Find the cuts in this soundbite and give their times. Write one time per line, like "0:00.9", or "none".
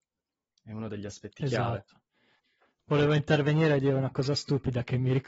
none